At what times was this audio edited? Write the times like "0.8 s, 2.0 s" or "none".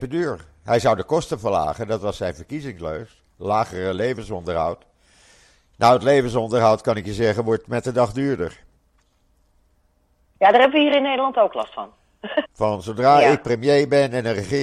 12.4 s